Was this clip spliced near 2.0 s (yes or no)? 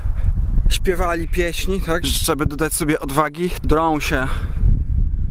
yes